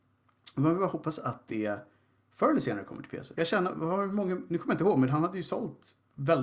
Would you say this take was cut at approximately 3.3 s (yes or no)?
yes